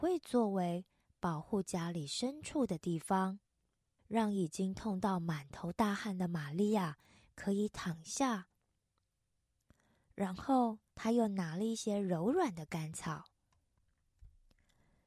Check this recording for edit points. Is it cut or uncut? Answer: cut